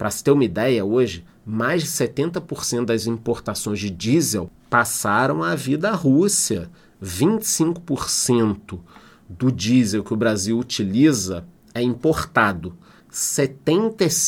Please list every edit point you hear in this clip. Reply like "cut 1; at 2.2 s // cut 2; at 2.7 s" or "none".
cut 1; at 13.0 s